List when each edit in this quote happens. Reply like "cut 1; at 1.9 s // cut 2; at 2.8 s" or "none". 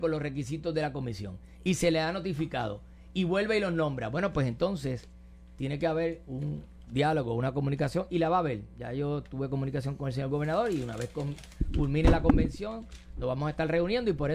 none